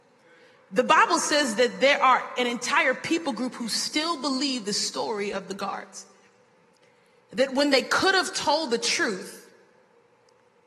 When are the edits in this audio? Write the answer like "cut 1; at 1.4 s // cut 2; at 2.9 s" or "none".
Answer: none

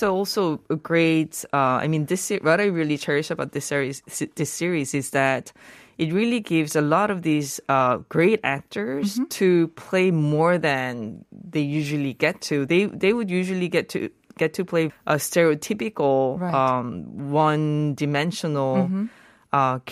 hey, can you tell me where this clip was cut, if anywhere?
cut 1; at 14.9 s

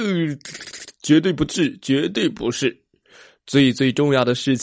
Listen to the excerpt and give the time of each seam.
none

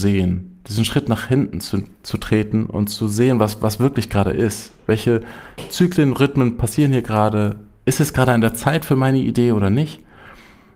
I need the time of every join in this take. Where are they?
none

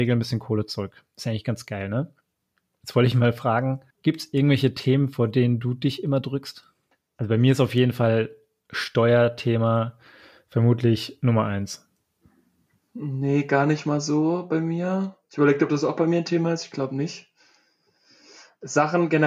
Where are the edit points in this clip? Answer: cut 1; at 3.9 s

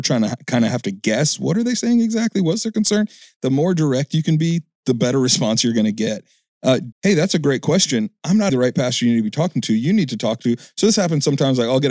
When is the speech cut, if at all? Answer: cut 1; at 6.9 s // cut 2; at 8.5 s

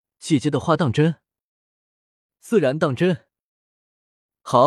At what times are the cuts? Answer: none

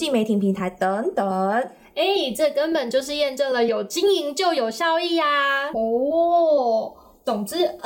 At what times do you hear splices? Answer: cut 1; at 5.7 s

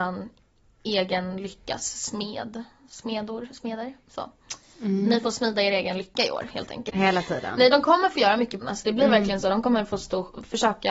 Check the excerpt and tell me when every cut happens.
cut 1; at 6.9 s // cut 2; at 8.6 s

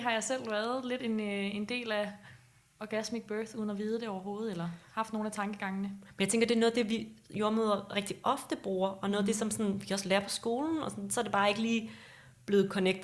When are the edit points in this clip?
none

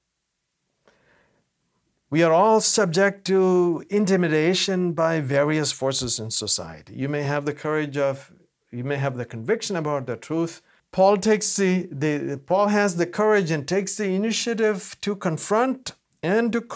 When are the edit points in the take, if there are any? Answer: cut 1; at 10.8 s

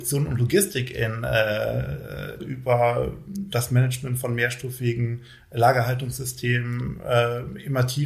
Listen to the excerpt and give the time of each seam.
cut 1; at 2.4 s

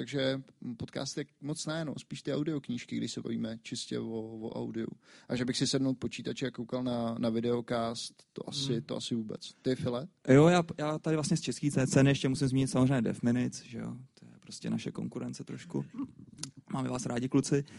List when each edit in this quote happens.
none

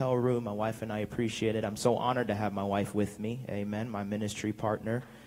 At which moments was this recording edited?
none

